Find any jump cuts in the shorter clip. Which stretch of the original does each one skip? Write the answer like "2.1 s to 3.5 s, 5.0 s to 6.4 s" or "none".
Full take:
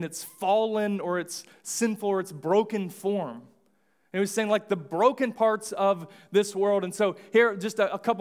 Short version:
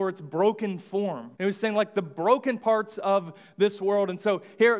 3.5 s to 4.1 s